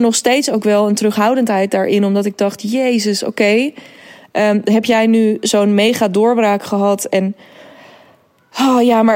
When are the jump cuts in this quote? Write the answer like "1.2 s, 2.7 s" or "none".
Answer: none